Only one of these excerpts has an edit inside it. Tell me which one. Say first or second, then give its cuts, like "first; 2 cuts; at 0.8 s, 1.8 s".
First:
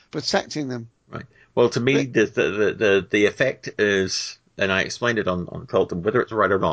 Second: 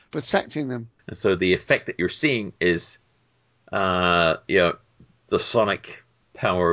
second; 1 cut; at 1.0 s